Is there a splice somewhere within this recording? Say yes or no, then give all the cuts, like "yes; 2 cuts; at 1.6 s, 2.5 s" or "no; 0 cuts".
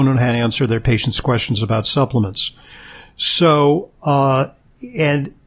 no; 0 cuts